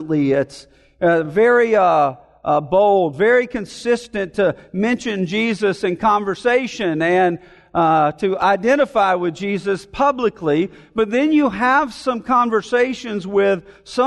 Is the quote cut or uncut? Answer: uncut